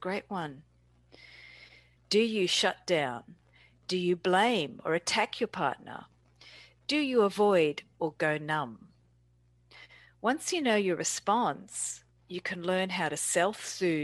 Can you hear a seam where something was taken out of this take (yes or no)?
yes